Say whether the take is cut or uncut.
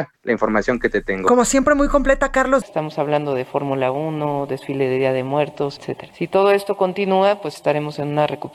cut